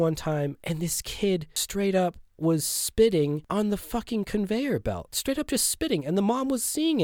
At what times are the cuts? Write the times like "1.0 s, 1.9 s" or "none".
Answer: none